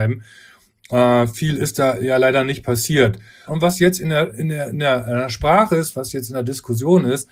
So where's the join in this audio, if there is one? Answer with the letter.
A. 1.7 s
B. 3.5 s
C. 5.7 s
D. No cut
B